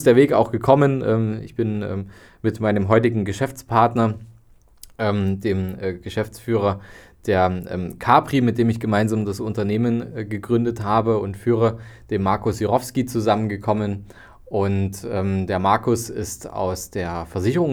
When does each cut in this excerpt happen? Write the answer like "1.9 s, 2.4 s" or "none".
none